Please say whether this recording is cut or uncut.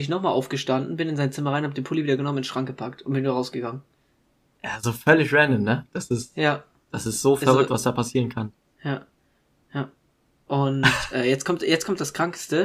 uncut